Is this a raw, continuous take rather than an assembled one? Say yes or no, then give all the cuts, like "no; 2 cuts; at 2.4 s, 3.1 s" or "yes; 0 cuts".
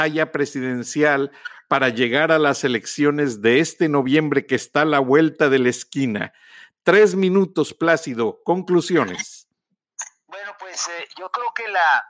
yes; 0 cuts